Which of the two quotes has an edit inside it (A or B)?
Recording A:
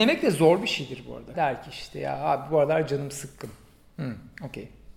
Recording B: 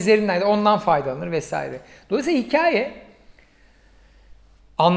A